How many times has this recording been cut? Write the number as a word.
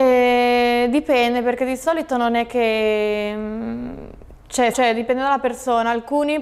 one